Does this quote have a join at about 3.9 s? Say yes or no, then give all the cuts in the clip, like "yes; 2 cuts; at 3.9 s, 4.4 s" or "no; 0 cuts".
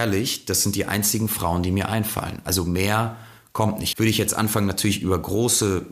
yes; 1 cut; at 3.9 s